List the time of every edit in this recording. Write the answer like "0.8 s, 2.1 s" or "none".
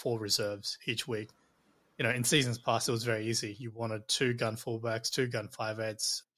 none